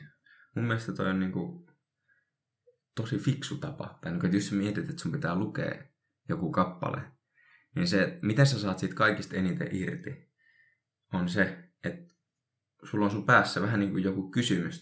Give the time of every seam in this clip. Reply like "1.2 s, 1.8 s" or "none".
none